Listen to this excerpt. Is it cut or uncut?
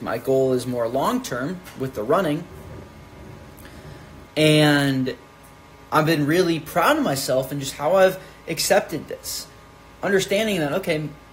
cut